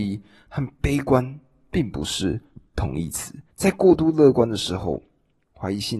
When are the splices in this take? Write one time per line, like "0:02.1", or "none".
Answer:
0:03.5